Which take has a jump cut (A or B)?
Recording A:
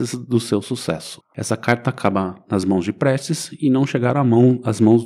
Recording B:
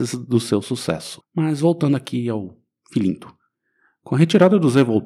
B